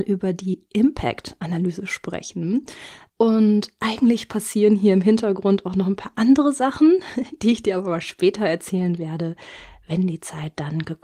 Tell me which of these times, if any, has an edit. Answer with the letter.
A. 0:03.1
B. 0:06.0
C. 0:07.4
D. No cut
A